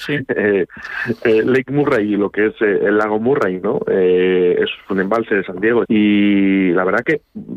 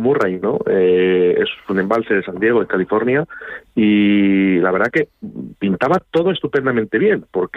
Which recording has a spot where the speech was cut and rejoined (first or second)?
first